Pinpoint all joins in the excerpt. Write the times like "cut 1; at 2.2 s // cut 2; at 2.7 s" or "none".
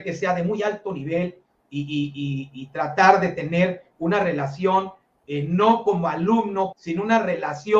cut 1; at 6.7 s